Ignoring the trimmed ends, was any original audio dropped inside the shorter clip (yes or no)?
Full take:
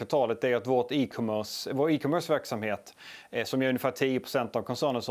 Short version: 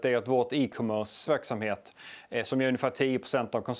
yes